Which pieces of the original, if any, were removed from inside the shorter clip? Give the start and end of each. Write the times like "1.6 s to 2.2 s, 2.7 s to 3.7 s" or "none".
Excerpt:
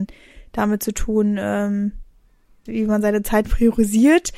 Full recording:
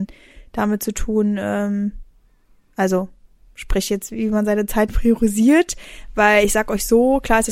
2.7 s to 4.1 s